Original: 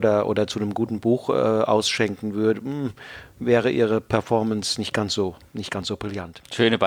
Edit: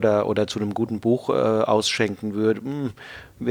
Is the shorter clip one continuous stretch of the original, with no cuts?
yes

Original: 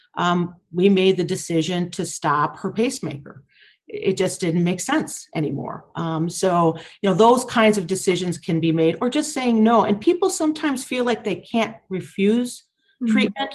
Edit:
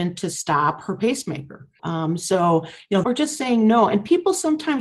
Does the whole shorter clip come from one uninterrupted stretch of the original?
no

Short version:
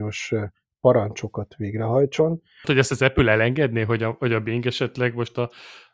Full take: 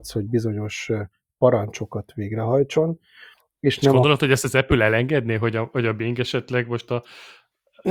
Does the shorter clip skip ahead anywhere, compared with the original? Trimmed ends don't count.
yes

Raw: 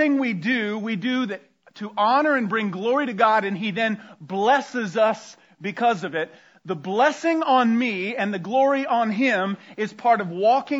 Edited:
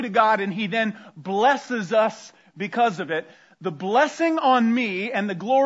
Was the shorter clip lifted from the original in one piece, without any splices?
yes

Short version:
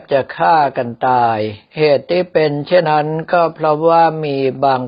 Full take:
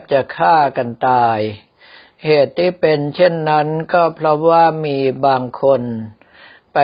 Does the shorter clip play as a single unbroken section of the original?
no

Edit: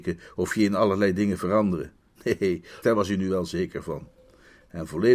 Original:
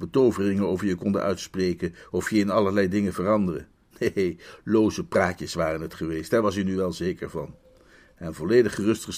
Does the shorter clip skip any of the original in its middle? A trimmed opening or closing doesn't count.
yes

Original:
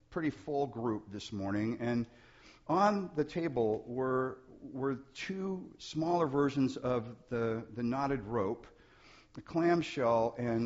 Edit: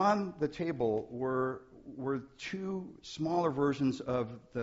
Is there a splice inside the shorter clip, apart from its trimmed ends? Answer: no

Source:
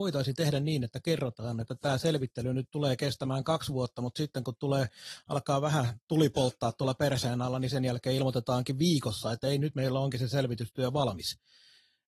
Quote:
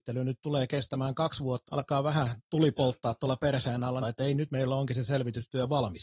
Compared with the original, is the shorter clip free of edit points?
no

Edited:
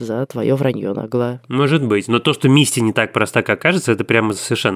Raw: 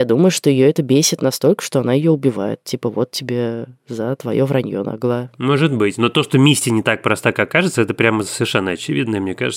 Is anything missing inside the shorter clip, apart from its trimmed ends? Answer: no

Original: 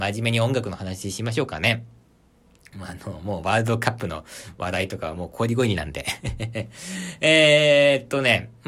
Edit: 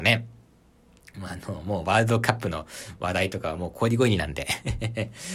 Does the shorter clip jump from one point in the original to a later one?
no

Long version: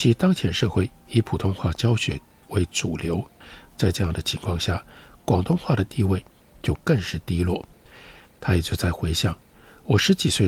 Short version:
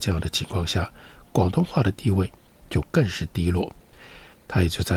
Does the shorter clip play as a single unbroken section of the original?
yes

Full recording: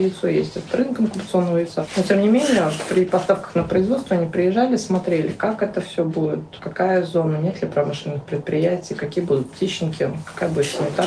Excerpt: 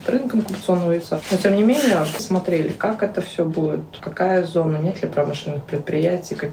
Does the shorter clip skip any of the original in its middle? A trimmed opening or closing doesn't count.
yes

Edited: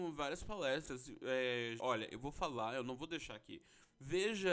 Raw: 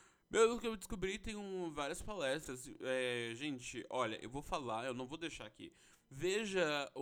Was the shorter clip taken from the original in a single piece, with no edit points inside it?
no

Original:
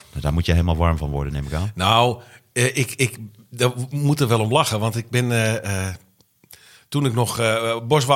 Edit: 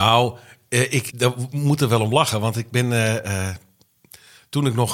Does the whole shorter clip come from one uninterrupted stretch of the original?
no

